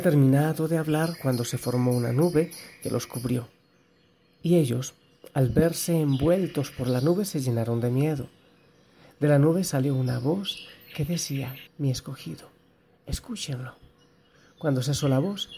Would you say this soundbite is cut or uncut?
cut